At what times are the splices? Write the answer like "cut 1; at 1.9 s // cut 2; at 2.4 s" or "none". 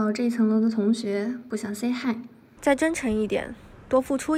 cut 1; at 2.6 s